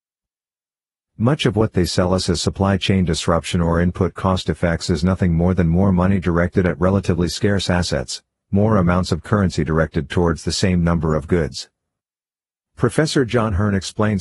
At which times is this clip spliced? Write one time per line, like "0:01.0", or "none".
none